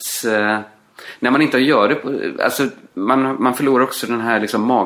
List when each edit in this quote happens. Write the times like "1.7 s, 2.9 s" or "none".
none

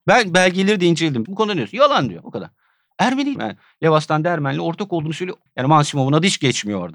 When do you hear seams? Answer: 1.3 s, 3.4 s, 5.5 s

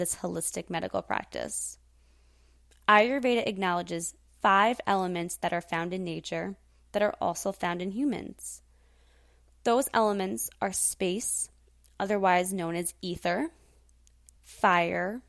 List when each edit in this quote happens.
14.4 s

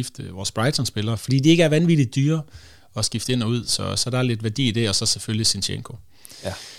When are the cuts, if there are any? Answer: none

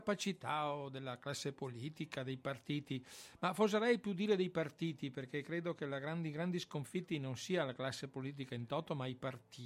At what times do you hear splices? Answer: none

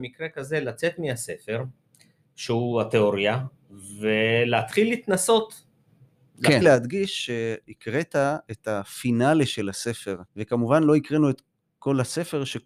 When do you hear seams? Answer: 6.6 s, 10.3 s

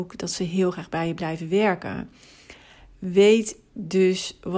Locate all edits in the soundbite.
none

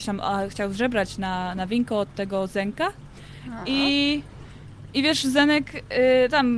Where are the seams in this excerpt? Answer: none

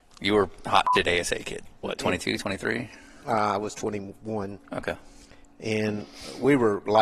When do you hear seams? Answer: 1.8 s

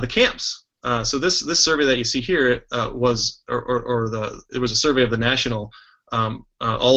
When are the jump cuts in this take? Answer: none

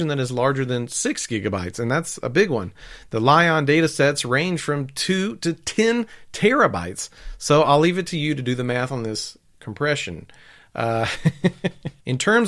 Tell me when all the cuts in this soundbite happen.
none

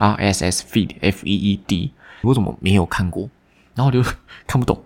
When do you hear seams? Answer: 2.2 s

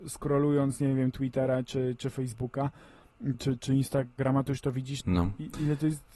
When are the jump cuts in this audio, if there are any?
3.3 s, 5.0 s

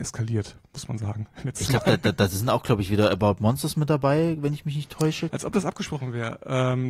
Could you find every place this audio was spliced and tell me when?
5.3 s

